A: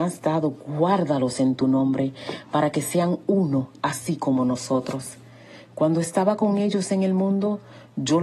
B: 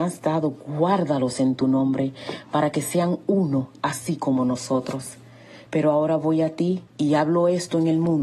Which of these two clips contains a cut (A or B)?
B